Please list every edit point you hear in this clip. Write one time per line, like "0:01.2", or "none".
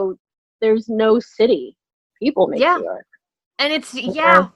0:02.1